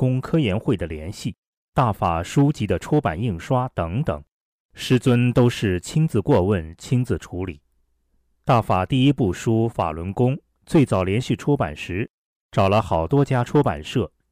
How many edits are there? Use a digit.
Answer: 0